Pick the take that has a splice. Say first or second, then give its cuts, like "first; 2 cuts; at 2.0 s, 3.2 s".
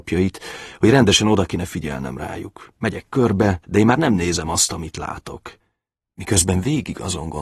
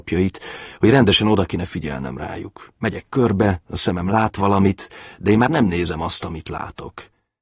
first; 2 cuts; at 3.6 s, 6.0 s